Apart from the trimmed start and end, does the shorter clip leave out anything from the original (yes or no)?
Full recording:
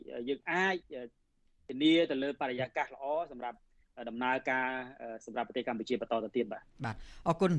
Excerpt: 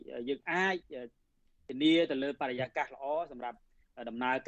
no